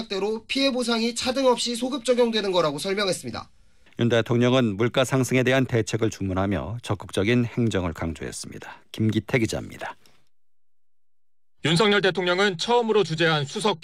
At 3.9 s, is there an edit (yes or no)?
yes